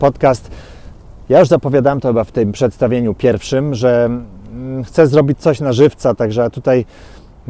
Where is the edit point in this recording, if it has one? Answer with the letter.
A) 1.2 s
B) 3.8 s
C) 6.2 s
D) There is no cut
A